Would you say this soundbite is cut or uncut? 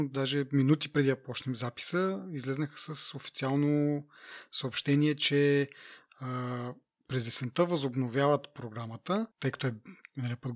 cut